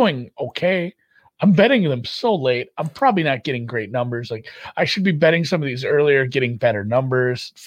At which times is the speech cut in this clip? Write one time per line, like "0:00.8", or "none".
0:01.2

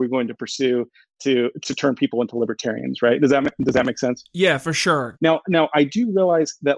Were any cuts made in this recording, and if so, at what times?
0:05.1

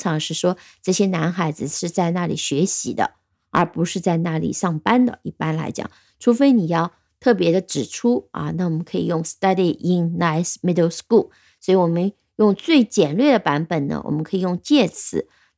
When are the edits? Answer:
none

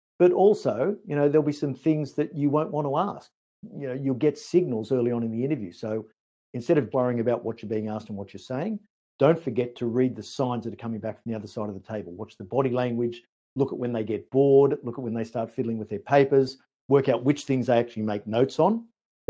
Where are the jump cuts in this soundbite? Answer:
0:06.9

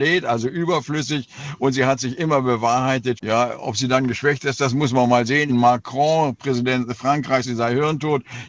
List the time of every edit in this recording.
0:03.2
0:05.5
0:07.4

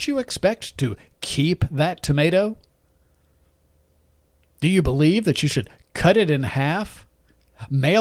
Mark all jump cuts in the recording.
none

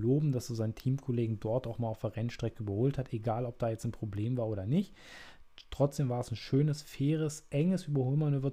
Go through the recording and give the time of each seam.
none

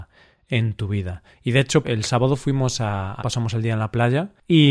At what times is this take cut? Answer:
0:01.8
0:03.2

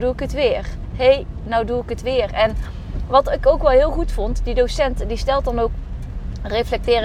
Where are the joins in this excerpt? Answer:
none

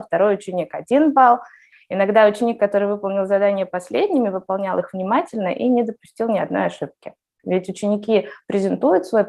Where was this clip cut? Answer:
0:01.7
0:07.4

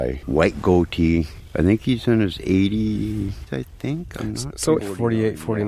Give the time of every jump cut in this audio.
0:03.5
0:04.8

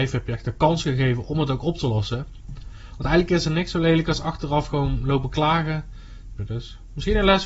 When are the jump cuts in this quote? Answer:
0:06.4

